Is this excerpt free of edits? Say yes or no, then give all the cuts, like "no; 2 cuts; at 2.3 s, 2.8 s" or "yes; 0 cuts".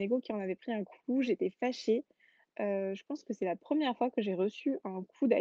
yes; 0 cuts